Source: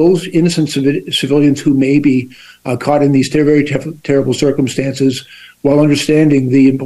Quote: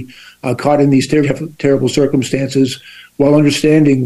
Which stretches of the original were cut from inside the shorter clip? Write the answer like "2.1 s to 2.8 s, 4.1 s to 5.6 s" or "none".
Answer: 3.4 s to 3.7 s